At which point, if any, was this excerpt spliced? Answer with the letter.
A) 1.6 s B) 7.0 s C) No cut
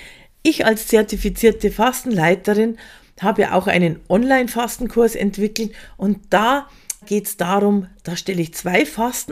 B